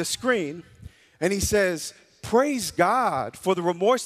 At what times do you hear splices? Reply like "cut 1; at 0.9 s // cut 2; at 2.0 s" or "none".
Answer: none